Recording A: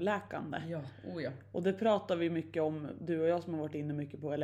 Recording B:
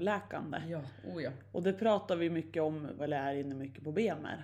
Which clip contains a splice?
B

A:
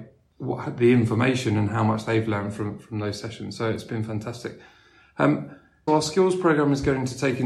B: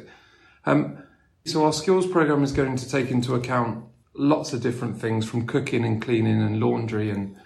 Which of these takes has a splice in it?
A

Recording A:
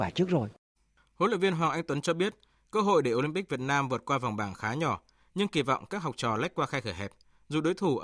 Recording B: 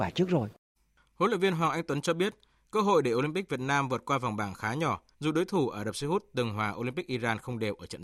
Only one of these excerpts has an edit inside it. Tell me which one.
B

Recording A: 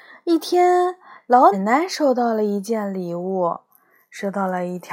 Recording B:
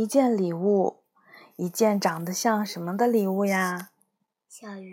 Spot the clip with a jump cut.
A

